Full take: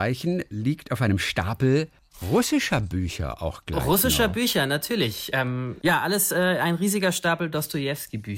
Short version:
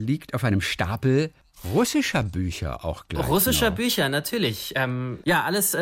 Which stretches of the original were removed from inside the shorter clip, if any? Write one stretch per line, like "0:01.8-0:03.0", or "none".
none